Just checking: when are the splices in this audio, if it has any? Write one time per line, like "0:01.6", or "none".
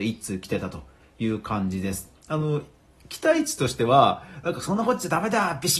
0:02.2